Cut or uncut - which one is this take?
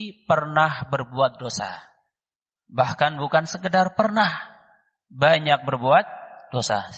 uncut